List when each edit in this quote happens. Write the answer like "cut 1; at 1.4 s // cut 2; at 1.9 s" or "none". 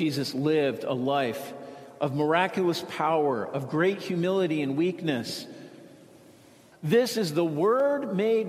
cut 1; at 6.7 s